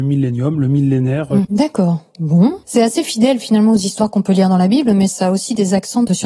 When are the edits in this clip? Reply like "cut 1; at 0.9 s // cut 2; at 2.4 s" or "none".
cut 1; at 1.4 s // cut 2; at 2.6 s